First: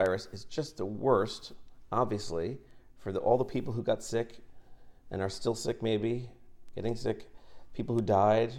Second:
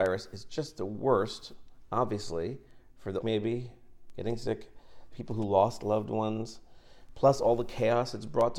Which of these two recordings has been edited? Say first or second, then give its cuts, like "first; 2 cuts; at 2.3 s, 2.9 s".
second; 2 cuts; at 3.2 s, 5.1 s